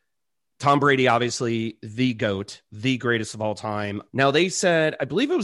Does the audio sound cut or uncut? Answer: cut